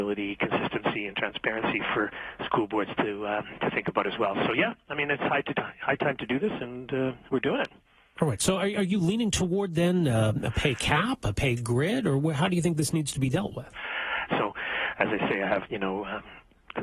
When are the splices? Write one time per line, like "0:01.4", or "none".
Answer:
0:14.3
0:15.7